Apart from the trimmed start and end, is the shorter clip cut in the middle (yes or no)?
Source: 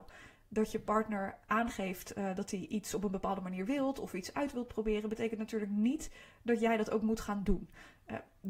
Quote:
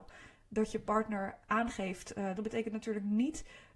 yes